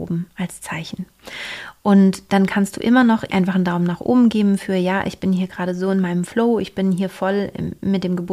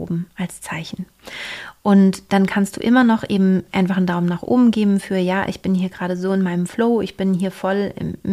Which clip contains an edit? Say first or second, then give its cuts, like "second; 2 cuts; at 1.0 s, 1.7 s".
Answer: first; 1 cut; at 3.3 s